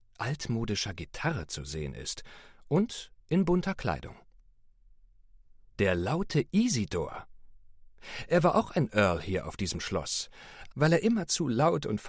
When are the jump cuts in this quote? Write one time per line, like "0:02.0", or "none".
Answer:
0:10.7